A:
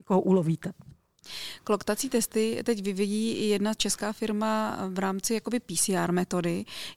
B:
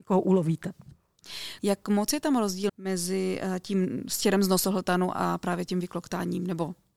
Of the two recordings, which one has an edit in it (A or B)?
B